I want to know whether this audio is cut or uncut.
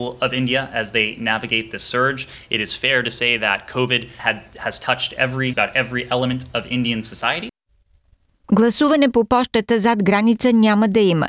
cut